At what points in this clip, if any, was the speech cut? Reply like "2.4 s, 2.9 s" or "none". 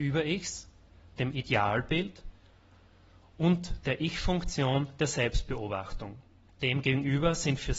6.5 s